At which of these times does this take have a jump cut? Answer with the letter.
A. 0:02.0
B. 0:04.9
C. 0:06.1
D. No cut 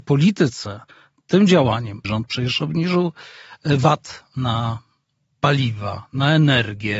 A